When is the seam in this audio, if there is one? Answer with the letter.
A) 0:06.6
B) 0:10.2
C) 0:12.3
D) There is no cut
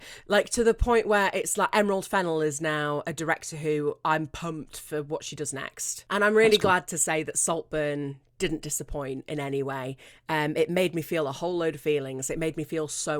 D